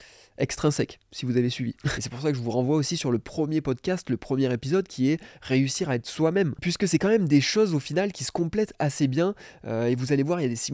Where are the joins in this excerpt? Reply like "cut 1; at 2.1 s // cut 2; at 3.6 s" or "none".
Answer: cut 1; at 1.9 s // cut 2; at 8.1 s